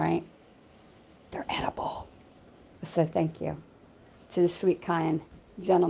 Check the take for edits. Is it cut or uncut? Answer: uncut